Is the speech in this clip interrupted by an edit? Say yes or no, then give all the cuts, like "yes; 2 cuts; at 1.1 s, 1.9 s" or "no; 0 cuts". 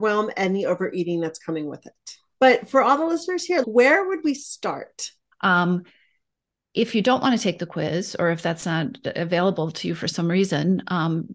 yes; 3 cuts; at 2.3 s, 3.6 s, 5.3 s